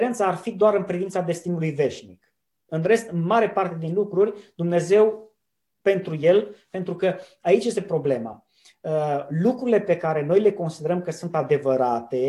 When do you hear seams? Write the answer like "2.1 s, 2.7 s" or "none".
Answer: 2.7 s